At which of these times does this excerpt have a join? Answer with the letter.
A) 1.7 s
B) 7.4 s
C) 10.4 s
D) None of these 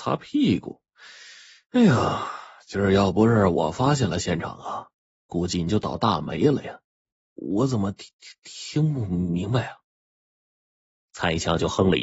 B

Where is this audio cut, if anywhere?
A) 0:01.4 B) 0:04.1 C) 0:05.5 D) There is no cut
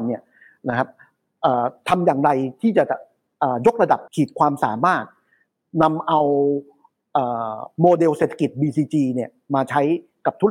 B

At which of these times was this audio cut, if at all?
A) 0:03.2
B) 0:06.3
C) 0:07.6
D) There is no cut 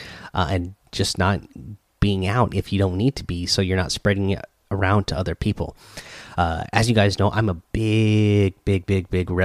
D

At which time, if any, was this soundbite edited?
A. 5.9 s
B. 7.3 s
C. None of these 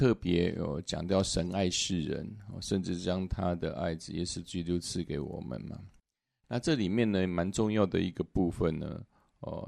C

